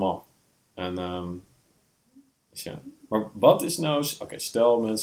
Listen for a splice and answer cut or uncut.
uncut